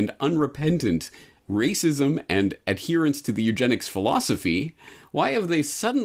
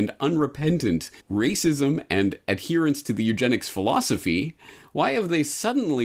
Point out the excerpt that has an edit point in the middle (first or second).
second